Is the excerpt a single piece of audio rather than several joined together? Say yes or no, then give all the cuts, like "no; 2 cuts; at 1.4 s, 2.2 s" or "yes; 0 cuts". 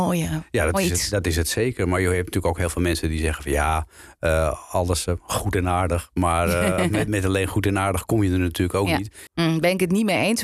no; 1 cut; at 9.3 s